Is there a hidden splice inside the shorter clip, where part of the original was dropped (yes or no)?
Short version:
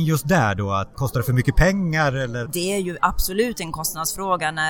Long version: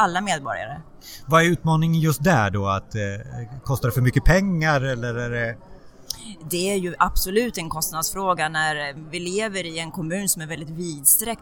yes